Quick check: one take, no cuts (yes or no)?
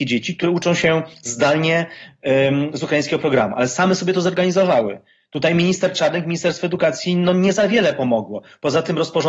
yes